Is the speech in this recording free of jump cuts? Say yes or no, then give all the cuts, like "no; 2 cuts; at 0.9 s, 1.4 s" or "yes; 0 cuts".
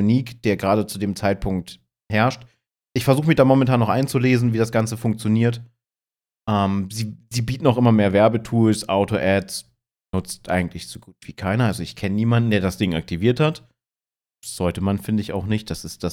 yes; 0 cuts